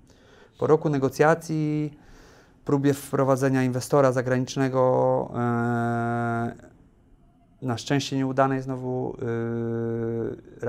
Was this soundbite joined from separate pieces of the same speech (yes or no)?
no